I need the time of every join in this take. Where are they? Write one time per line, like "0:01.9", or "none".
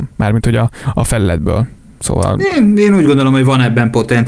none